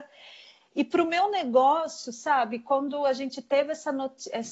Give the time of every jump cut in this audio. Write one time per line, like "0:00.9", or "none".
none

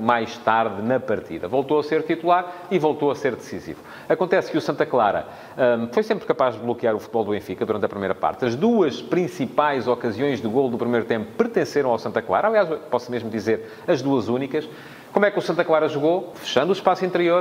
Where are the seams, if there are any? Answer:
0:16.3

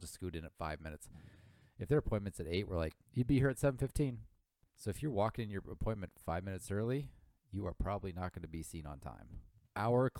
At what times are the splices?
0:04.6

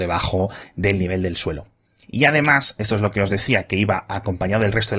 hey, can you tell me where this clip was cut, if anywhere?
none

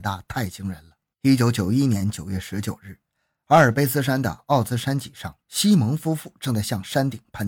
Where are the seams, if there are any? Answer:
0:01.1

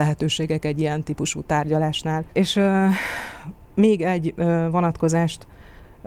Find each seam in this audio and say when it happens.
0:02.3

